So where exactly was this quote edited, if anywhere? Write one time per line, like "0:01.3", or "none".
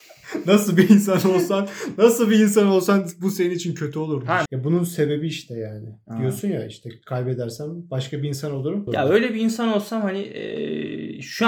0:04.5
0:08.9